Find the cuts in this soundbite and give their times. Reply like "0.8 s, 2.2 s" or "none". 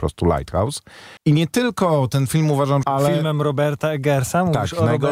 1.2 s, 2.8 s